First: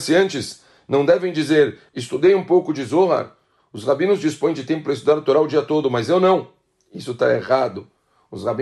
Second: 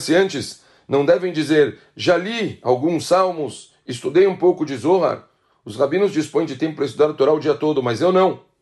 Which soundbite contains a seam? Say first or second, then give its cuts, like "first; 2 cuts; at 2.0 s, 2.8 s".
first; 1 cut; at 1.9 s